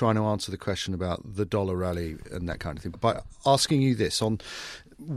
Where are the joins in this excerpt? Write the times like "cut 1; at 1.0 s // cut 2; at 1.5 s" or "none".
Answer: cut 1; at 2.9 s